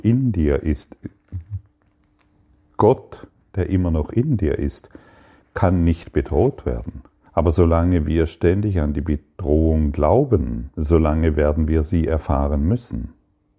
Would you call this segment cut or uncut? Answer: cut